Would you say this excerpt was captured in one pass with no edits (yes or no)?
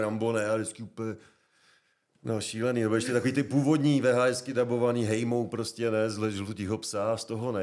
yes